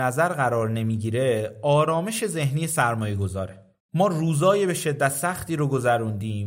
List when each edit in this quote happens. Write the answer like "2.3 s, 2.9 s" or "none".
none